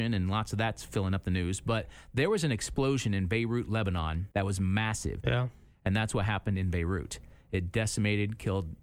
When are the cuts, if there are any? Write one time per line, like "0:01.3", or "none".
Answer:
0:05.2

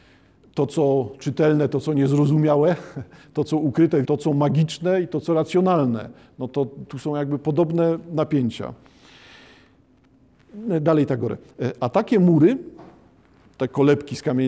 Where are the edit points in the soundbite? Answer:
0:04.0

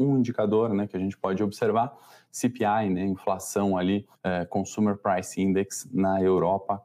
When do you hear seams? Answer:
0:04.1

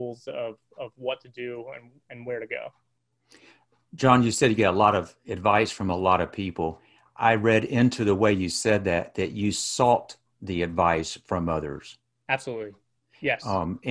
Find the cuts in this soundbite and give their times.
none

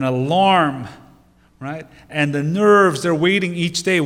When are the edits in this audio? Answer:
none

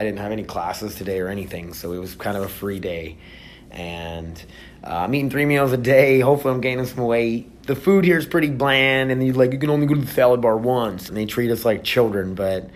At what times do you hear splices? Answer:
0:07.6
0:11.1

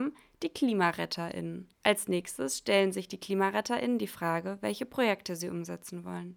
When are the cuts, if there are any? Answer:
0:01.7

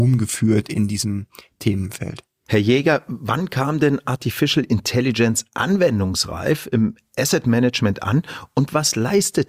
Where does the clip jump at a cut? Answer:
0:02.4

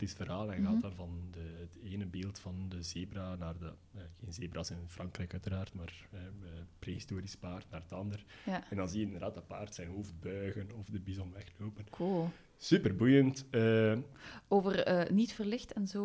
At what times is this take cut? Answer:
none

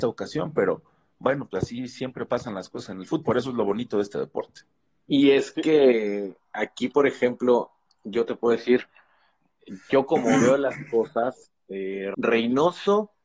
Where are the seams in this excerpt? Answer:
0:12.1

